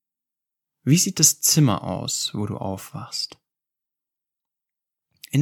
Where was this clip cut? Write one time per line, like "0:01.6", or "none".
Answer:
none